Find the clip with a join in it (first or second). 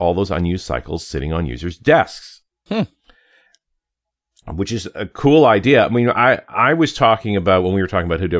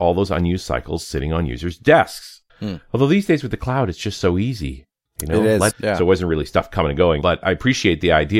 second